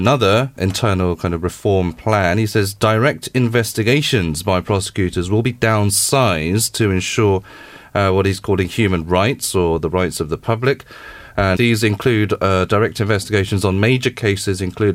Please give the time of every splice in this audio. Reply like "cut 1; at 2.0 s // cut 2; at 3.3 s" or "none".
cut 1; at 11.6 s